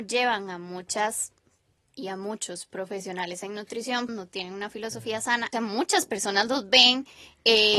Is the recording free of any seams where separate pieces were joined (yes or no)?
no